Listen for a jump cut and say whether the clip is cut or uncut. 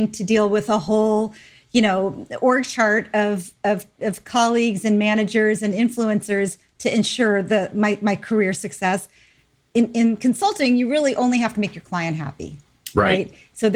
uncut